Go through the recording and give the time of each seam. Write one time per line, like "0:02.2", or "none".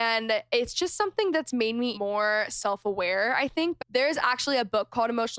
0:01.9
0:03.8

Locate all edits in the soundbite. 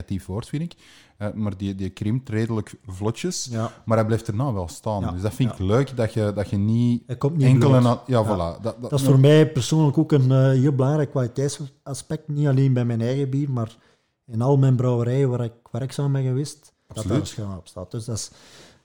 0:16.9

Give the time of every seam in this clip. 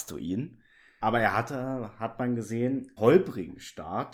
0:01.0
0:03.0

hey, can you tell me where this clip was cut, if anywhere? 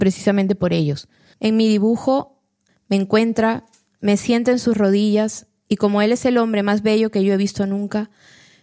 0:01.3
0:02.7

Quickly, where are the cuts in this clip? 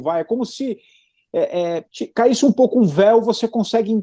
0:01.9

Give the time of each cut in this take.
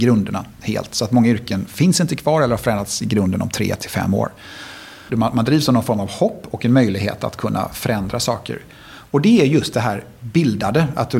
0:05.1

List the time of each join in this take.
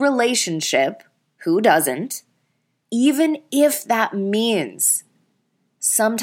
0:02.8

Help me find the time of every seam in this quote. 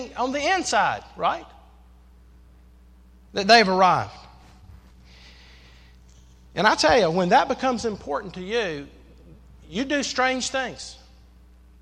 none

